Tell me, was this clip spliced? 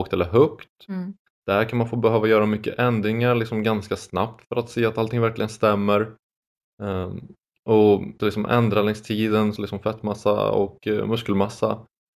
yes; 2 cuts; at 8.2 s, 9.6 s

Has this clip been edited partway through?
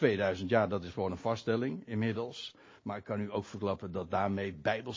no; 0 cuts

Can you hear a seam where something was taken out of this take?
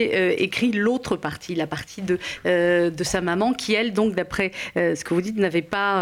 no; 0 cuts

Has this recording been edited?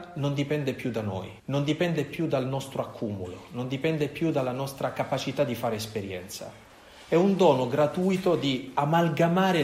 yes; 1 cut; at 1.4 s

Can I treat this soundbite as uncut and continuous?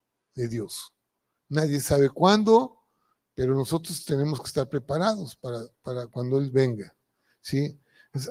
yes; 0 cuts

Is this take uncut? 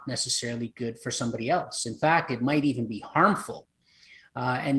yes; 0 cuts

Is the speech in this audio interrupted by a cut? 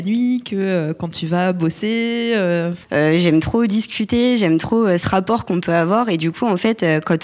yes; 1 cut; at 2.8 s

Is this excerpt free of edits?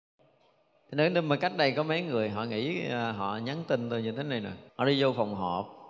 no; 1 cut; at 4.7 s

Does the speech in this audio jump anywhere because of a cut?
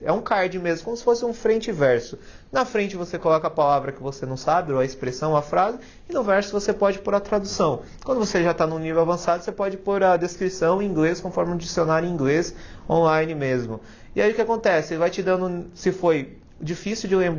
no; 0 cuts

